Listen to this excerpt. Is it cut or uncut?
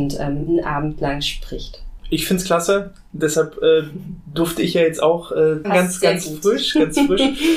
cut